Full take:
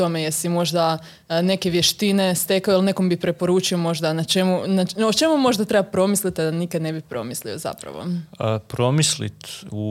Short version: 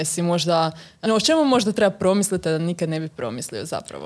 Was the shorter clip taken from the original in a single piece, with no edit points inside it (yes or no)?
no